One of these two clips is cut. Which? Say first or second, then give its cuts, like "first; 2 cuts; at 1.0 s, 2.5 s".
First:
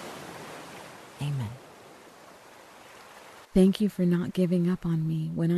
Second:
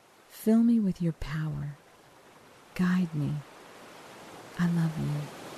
first; 1 cut; at 3.4 s